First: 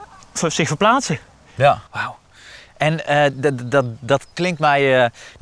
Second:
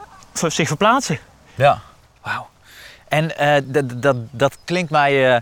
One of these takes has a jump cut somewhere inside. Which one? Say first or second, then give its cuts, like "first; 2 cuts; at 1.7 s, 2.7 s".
first; 1 cut; at 1.9 s